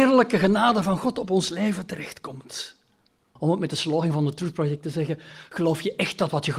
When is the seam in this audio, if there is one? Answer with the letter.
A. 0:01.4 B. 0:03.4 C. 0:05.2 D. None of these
B